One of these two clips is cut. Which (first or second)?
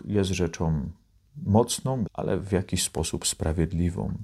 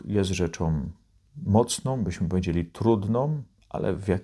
first